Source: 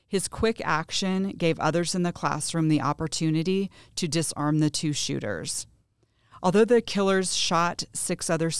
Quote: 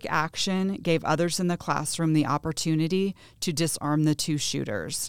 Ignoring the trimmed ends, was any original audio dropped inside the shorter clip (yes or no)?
no